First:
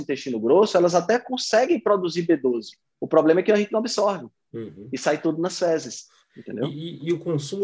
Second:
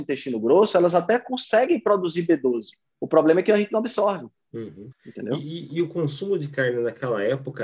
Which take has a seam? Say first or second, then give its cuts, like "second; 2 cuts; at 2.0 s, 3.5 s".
second; 1 cut; at 4.9 s